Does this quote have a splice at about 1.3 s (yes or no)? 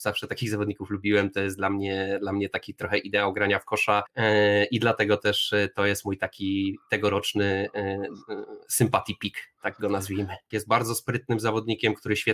no